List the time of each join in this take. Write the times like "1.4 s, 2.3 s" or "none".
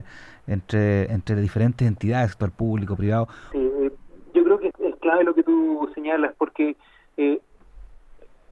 3.5 s, 4.7 s

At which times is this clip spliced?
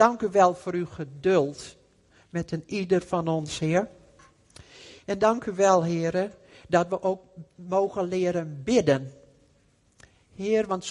none

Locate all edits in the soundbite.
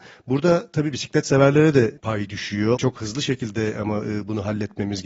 2.8 s

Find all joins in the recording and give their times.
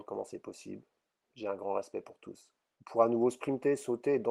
1.2 s, 2.7 s

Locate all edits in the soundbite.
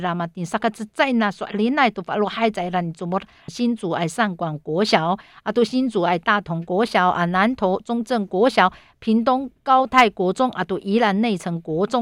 3.5 s

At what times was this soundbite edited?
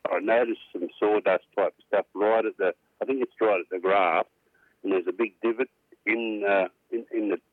none

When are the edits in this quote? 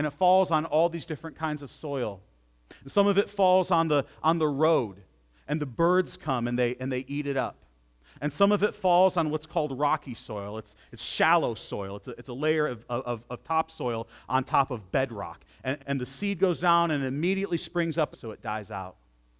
15.8 s, 18.1 s

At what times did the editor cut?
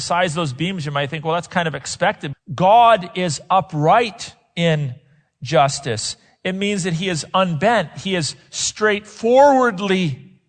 2.3 s

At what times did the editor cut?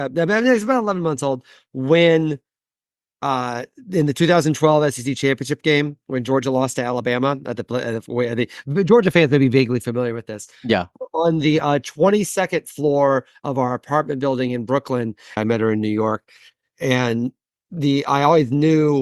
15.4 s

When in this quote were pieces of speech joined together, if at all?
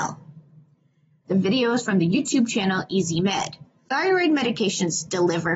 1.2 s, 3.8 s

